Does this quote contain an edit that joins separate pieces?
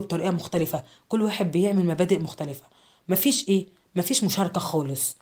no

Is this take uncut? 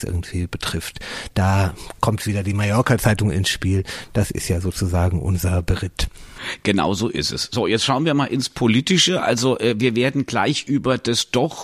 yes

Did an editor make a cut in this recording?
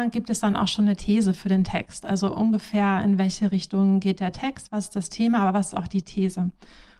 no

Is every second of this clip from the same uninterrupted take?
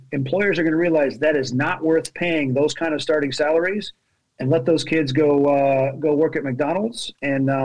yes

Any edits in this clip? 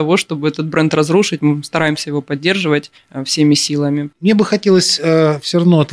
yes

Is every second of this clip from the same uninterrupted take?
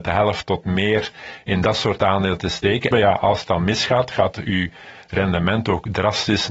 no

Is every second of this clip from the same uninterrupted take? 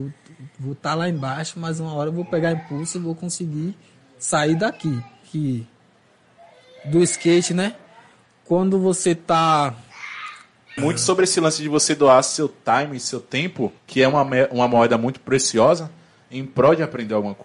no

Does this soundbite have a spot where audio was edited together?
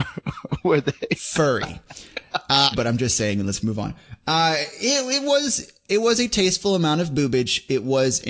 yes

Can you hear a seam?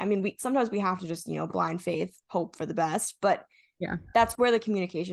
no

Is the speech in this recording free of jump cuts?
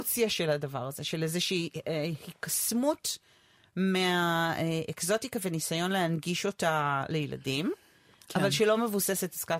yes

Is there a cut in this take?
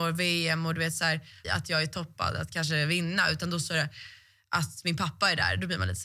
yes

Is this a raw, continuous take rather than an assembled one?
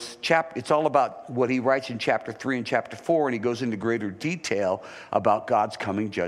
yes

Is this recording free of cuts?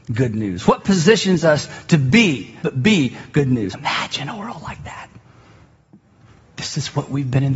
no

